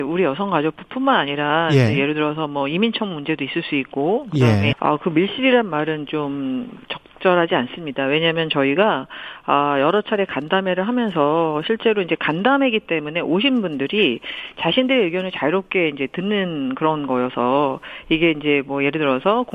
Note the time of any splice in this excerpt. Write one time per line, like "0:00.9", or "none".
0:04.7